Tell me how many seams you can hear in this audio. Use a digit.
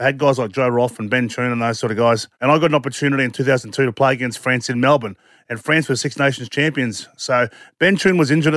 1